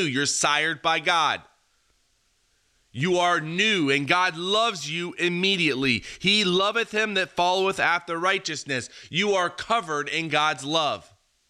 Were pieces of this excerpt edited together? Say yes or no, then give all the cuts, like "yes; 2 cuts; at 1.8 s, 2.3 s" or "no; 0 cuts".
no; 0 cuts